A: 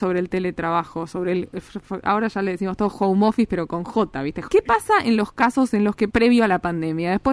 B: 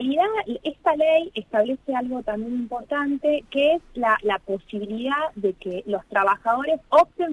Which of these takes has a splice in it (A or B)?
A